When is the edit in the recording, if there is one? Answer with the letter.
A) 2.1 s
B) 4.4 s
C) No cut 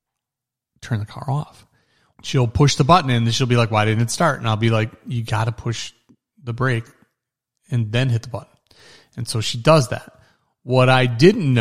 A